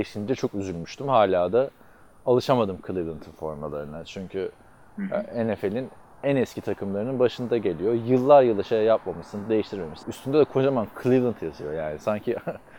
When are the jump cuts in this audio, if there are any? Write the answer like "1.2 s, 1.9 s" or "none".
10.0 s